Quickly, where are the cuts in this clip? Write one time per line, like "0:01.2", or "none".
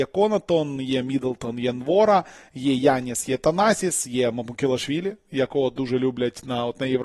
none